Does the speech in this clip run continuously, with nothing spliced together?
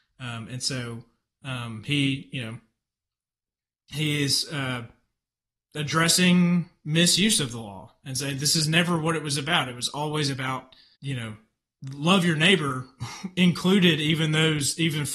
no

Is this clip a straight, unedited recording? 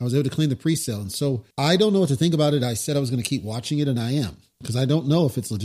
no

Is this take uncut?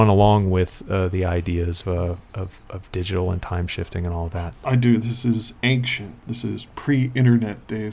no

